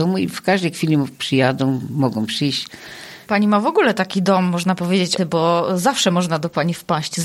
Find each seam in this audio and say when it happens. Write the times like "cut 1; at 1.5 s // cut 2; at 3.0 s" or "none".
cut 1; at 3.3 s // cut 2; at 5.2 s